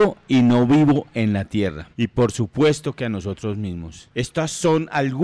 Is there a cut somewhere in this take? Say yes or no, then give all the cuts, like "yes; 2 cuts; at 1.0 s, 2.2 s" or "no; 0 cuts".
yes; 1 cut; at 4.1 s